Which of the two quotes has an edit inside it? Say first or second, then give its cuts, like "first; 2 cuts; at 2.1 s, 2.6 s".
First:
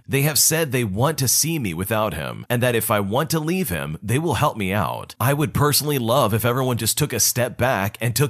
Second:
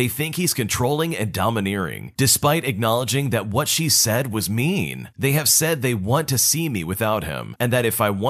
second; 1 cut; at 2.2 s